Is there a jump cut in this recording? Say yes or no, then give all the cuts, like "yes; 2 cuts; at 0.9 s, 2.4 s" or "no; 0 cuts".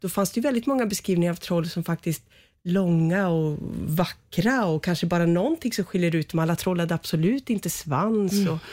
no; 0 cuts